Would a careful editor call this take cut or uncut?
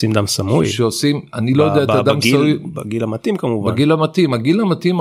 uncut